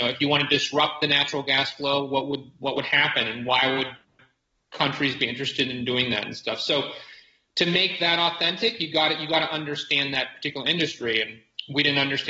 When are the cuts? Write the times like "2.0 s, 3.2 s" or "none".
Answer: none